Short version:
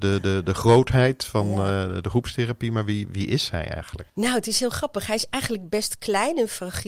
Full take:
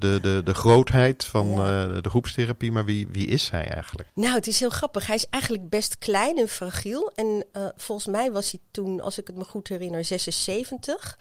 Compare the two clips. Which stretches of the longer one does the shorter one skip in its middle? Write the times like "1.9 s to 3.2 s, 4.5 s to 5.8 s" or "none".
none